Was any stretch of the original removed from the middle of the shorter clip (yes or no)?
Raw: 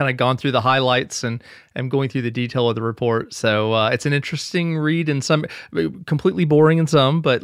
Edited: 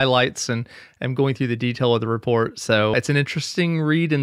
yes